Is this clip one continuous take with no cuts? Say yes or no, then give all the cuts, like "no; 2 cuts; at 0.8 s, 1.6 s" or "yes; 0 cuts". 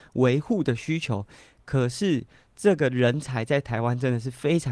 yes; 0 cuts